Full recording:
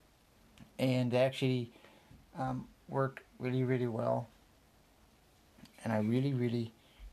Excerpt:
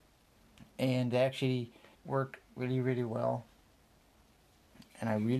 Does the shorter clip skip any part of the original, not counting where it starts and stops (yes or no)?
yes